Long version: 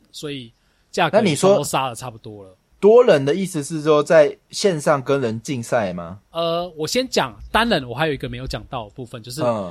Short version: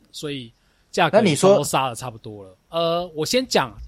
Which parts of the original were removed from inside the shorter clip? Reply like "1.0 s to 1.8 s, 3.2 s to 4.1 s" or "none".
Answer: 2.7 s to 6.3 s